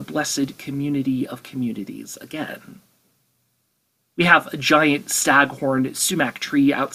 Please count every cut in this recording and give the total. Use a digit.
1